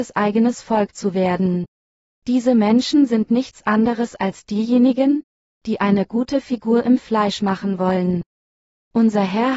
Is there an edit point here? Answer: yes; 1 cut; at 2.1 s

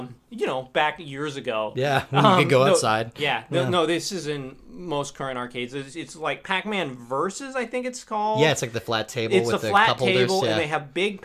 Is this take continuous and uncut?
yes; 0 cuts

